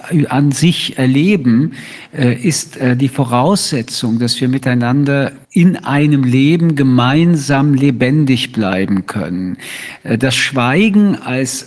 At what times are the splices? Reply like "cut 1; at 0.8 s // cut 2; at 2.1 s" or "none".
cut 1; at 5.4 s